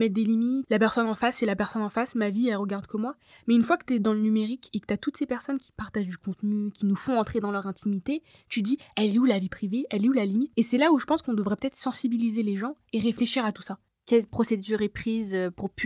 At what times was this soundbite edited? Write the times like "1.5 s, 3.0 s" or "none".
13.9 s